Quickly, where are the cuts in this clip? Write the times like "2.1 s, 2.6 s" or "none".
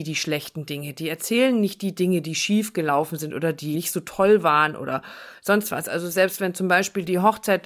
3.7 s